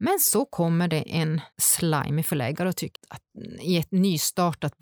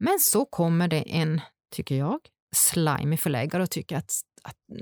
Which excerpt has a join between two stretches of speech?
first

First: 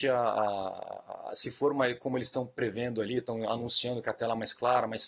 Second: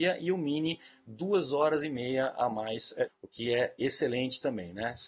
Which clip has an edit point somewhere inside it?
second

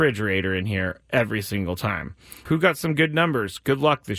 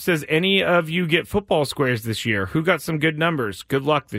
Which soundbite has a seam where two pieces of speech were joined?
first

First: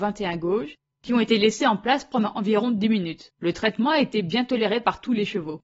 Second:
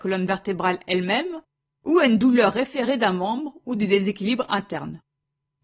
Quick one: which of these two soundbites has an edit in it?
first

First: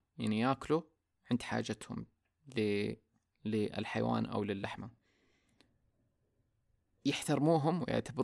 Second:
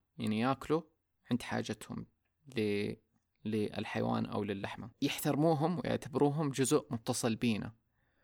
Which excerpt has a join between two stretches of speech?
second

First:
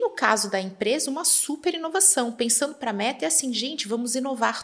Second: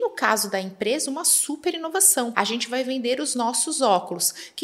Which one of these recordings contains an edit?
second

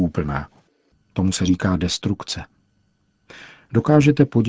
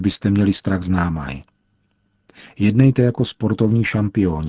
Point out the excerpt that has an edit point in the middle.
first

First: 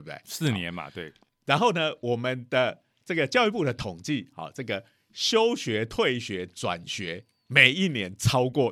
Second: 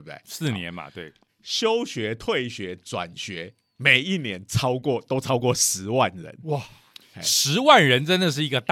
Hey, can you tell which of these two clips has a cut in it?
second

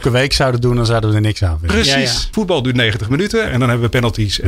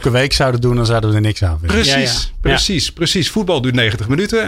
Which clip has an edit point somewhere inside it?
first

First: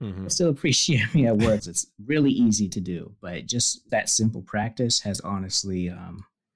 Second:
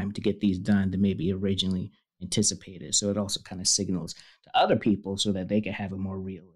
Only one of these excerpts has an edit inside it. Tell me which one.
first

